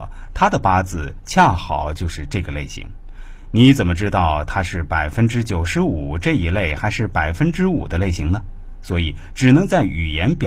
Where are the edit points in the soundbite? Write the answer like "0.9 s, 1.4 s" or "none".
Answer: none